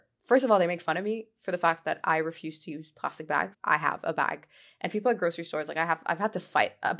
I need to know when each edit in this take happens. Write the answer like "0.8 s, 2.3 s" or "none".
3.5 s